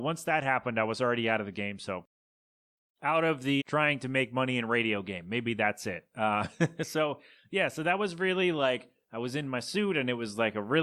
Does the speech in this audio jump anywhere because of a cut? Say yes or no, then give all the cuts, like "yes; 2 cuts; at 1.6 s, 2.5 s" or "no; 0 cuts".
yes; 1 cut; at 3.6 s